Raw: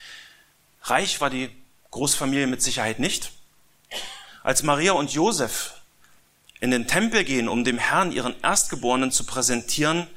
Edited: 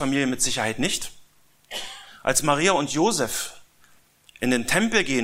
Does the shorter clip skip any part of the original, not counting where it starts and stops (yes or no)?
no